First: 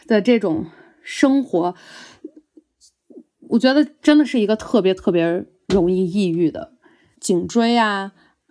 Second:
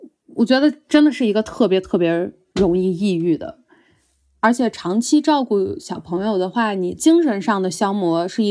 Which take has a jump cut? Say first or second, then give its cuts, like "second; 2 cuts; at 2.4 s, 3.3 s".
first; 1 cut; at 7.1 s